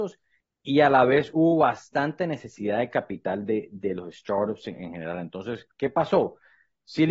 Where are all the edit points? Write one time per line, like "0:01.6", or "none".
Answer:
none